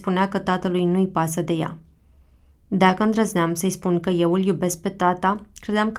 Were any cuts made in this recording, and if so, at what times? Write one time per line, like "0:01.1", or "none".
none